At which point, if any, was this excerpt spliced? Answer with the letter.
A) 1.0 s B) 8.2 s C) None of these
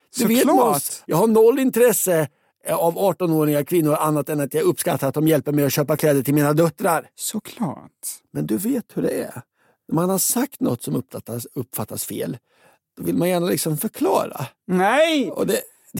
A